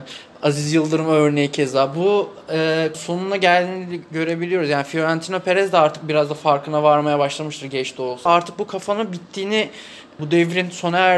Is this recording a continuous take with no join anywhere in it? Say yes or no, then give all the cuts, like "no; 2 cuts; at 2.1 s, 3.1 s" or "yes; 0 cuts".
no; 3 cuts; at 2.9 s, 8.3 s, 10.2 s